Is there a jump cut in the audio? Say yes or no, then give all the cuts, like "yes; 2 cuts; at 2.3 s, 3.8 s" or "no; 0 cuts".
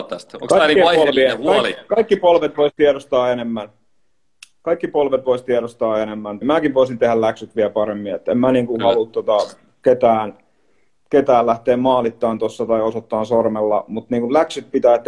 yes; 1 cut; at 6.4 s